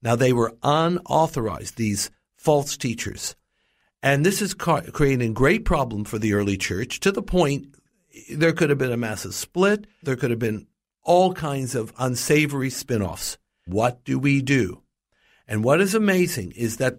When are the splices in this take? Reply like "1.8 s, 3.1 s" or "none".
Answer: 10.0 s, 13.7 s